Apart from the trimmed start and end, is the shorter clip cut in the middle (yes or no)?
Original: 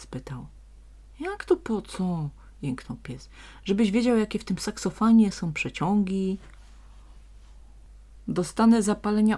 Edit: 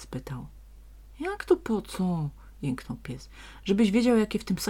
no